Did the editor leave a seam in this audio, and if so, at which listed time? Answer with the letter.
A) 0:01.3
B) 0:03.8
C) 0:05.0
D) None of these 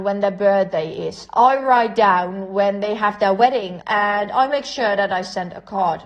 B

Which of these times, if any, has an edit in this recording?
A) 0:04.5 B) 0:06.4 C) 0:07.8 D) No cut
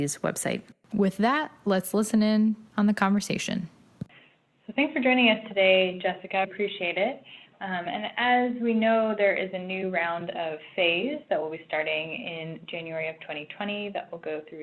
B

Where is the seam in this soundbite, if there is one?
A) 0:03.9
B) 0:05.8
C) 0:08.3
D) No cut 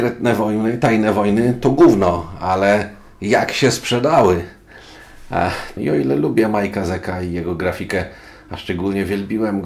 B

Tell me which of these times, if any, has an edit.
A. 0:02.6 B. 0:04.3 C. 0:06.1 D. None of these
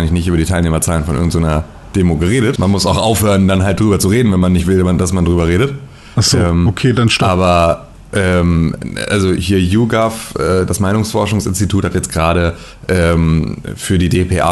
A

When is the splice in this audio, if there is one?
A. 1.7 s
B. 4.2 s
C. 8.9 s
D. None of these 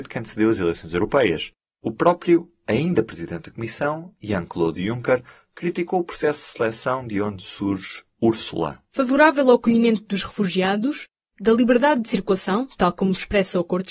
A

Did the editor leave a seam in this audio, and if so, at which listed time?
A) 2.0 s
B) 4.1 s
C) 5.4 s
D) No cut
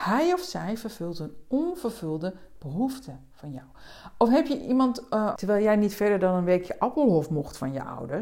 C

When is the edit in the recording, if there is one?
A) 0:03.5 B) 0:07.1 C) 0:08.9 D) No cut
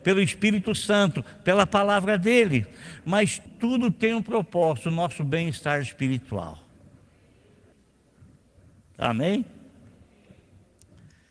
A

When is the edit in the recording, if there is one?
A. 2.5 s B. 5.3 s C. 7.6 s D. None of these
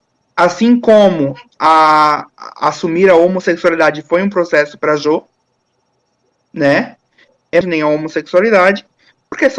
C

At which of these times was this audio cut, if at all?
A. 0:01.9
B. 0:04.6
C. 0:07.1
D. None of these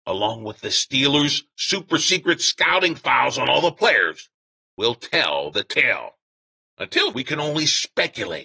C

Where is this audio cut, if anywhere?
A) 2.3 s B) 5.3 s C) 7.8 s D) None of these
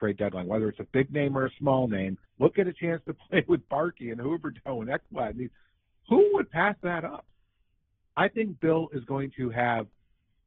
A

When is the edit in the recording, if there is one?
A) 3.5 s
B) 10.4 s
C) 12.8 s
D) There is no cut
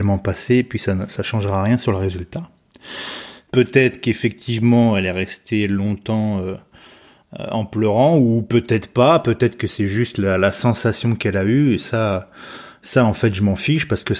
A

